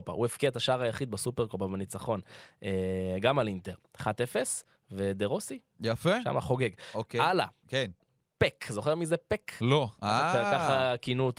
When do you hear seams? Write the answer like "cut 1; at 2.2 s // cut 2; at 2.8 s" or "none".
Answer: cut 1; at 10.0 s